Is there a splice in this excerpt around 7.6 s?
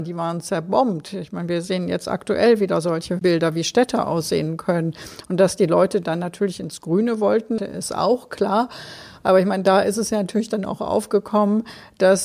yes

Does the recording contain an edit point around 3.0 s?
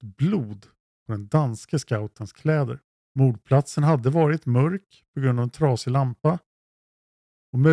yes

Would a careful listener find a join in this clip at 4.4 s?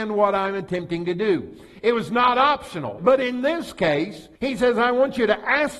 yes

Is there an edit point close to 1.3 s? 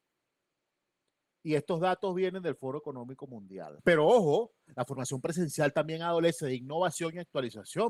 no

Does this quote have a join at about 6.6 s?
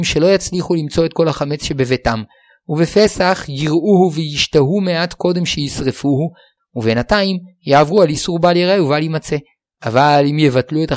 yes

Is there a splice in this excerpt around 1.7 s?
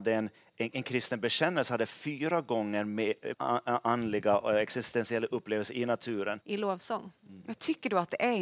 no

